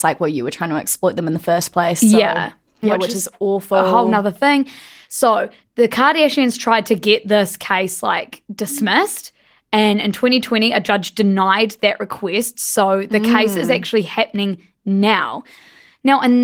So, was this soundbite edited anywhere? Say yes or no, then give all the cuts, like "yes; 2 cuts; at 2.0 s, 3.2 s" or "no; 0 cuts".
yes; 1 cut; at 2.8 s